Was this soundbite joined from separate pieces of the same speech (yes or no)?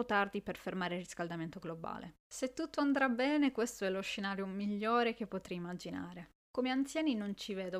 no